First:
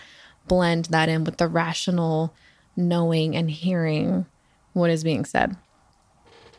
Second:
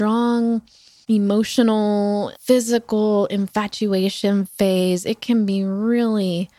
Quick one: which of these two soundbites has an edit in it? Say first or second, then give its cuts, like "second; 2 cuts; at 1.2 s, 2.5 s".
second; 1 cut; at 2.3 s